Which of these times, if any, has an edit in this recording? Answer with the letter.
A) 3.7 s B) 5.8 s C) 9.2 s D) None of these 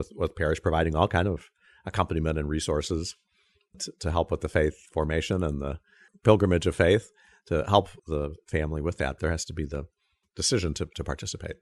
C